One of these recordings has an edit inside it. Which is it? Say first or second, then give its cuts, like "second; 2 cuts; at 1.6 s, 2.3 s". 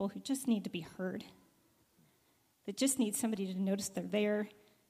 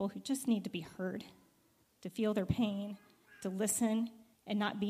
second; 1 cut; at 1.9 s